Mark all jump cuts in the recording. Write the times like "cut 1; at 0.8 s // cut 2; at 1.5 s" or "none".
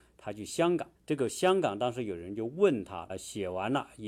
cut 1; at 1.0 s // cut 2; at 3.1 s

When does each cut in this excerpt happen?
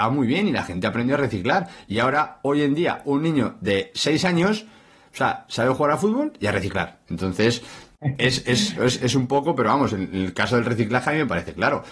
cut 1; at 7.1 s

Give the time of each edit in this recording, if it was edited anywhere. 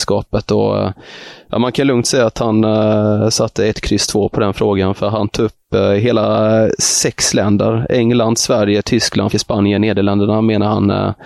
cut 1; at 9.3 s

